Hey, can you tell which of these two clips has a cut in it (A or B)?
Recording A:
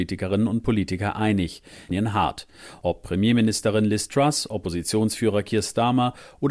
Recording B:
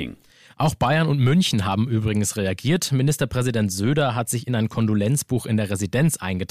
A